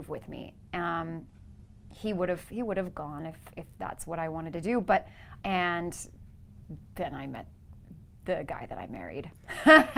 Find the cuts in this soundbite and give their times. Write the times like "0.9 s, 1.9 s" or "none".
5.4 s